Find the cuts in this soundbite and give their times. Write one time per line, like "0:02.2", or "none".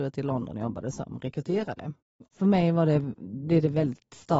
0:02.3